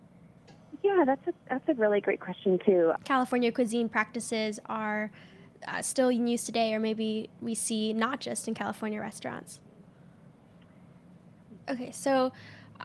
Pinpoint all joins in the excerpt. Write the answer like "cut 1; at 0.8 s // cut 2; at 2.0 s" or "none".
cut 1; at 3.0 s // cut 2; at 11.6 s